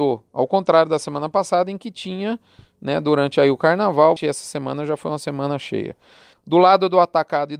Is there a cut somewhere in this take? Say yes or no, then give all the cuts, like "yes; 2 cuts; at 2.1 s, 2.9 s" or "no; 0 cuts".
yes; 2 cuts; at 4.2 s, 6.3 s